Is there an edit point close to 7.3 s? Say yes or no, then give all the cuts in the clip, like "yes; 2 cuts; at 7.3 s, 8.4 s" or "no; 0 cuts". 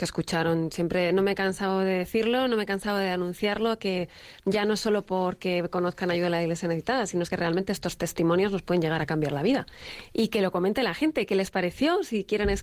no; 0 cuts